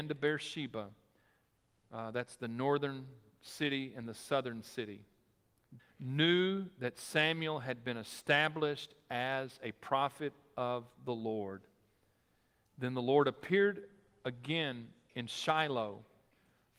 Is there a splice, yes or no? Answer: yes